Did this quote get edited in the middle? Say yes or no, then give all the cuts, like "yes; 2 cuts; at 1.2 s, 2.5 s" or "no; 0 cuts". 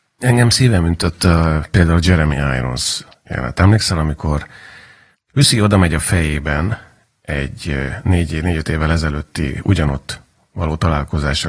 no; 0 cuts